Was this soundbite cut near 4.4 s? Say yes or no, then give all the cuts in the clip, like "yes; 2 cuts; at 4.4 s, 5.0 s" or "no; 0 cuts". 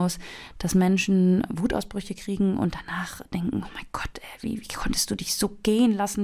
no; 0 cuts